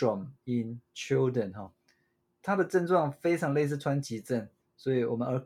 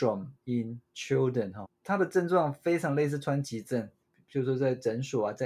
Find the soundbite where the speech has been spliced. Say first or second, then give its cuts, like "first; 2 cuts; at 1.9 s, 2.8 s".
second; 2 cuts; at 1.6 s, 4.1 s